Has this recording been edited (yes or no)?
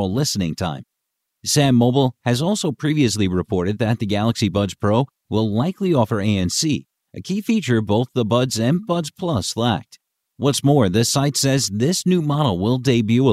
no